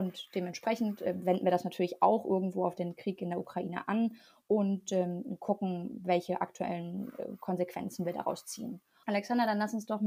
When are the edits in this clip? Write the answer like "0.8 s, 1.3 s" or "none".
9.0 s